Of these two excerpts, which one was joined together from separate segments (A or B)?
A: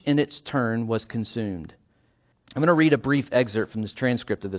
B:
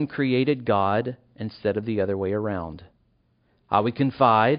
A